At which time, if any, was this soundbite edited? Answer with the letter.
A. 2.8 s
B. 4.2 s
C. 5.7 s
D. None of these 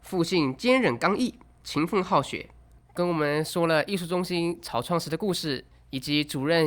A